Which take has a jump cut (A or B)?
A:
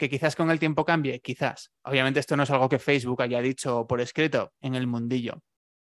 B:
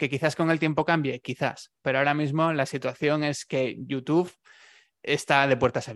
A